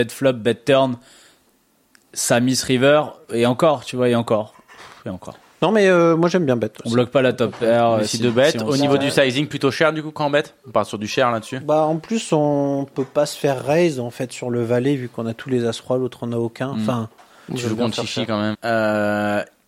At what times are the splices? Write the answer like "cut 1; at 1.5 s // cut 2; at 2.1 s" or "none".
cut 1; at 17.5 s // cut 2; at 18.5 s